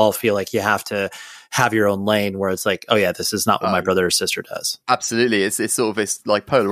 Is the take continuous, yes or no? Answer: yes